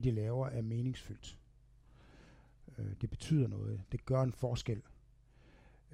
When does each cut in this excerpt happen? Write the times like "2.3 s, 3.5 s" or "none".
none